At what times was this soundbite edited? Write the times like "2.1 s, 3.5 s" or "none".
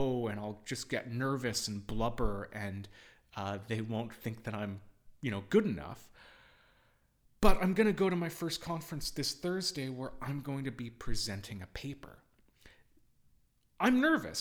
none